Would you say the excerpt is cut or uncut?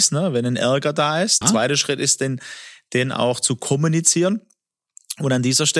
cut